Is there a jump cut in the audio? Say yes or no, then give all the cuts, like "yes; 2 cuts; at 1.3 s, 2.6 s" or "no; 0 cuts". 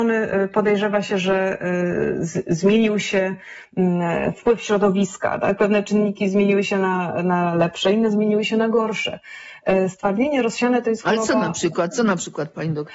no; 0 cuts